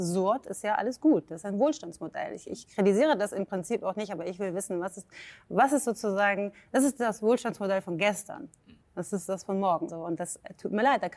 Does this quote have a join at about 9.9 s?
yes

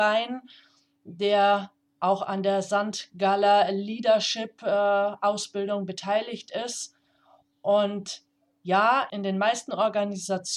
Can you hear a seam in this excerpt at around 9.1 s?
yes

